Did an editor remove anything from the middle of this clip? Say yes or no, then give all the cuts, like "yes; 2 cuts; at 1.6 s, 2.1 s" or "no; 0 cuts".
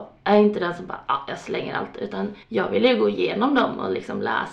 yes; 1 cut; at 2.4 s